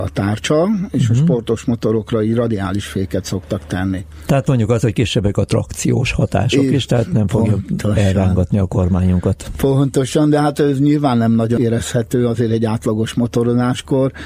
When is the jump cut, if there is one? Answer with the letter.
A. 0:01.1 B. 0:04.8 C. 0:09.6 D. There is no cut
D